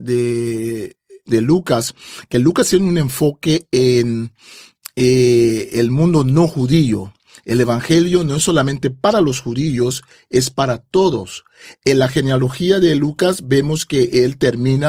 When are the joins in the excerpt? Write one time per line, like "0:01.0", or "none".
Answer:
none